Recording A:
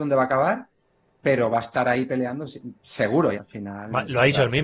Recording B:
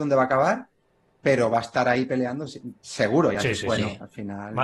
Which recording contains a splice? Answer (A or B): A